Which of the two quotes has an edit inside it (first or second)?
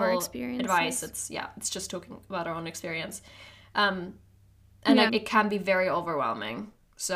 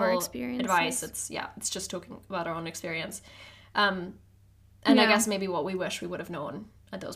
first